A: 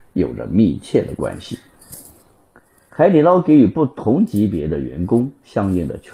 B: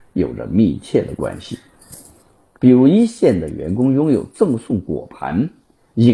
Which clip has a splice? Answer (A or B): B